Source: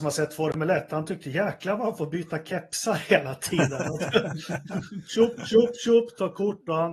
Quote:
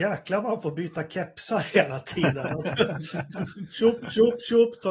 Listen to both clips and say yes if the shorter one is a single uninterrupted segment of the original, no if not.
yes